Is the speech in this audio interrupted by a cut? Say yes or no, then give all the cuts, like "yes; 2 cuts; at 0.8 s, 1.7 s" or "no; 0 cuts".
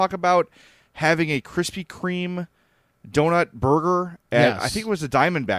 no; 0 cuts